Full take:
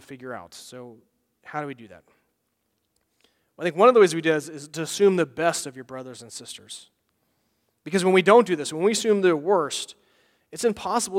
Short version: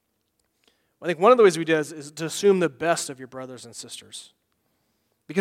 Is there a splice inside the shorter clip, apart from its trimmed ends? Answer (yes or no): no